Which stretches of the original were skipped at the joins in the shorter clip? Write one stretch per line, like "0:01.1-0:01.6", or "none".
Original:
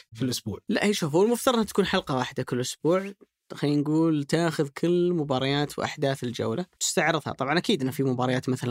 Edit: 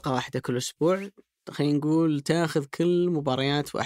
none

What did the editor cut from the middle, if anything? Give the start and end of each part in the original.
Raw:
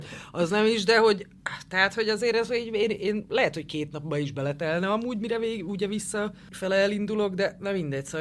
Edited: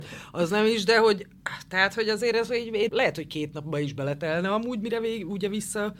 0:02.9-0:03.3

